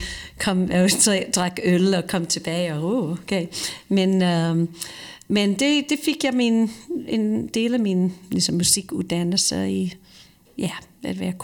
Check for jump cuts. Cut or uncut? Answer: uncut